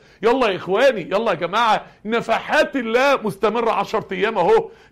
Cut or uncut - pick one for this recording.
uncut